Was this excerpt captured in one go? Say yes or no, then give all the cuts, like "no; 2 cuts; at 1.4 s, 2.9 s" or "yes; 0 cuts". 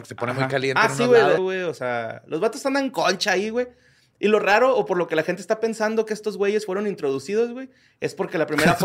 no; 1 cut; at 1.4 s